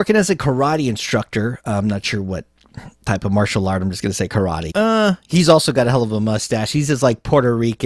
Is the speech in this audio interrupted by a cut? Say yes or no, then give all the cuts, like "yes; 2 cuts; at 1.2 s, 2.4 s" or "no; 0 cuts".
yes; 1 cut; at 4.7 s